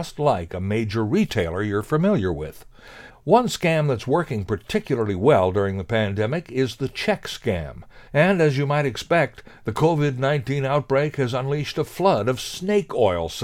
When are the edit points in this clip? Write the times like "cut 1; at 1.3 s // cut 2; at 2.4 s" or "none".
cut 1; at 3.1 s // cut 2; at 8.1 s